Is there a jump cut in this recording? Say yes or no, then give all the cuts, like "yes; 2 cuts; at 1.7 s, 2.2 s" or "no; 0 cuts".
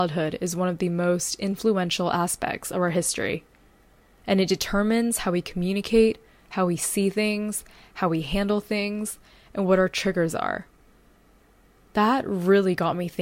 no; 0 cuts